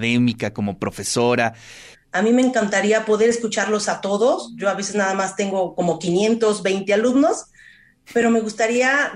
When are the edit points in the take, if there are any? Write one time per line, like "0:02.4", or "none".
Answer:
0:01.9